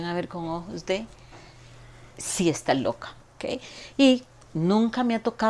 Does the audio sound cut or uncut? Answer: cut